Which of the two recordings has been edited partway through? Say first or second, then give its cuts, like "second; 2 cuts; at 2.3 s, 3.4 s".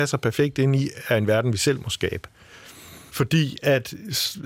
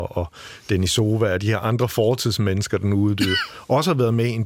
first; 1 cut; at 3.1 s